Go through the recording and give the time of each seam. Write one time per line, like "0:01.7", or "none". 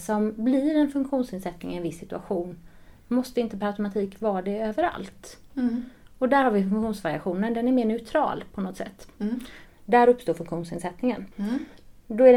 0:09.7
0:11.3